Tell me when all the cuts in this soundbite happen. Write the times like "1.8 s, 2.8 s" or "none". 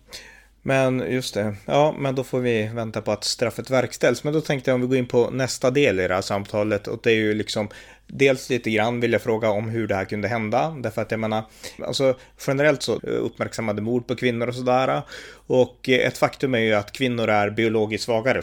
11.8 s, 13.0 s

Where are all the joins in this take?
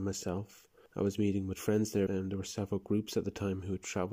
2.1 s

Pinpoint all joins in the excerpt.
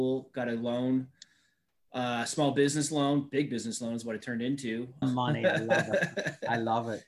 5.0 s

